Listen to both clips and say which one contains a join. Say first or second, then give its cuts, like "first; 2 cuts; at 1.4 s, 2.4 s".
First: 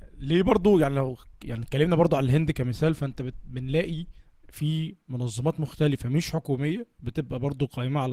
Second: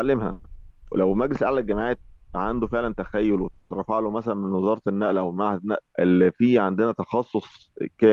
second; 2 cuts; at 0.9 s, 5.9 s